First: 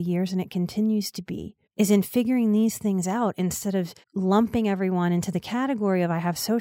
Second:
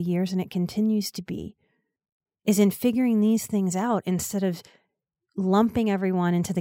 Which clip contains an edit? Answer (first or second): first